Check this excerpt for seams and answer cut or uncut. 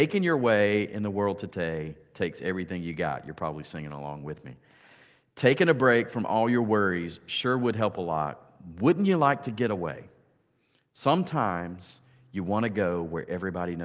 uncut